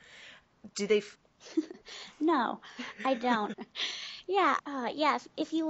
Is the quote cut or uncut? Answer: cut